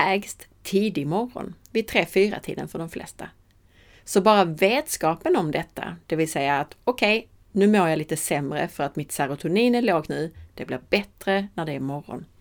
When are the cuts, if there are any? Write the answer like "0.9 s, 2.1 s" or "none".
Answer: 10.1 s